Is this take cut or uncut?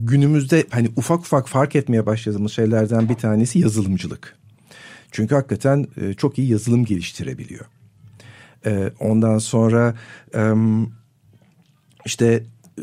uncut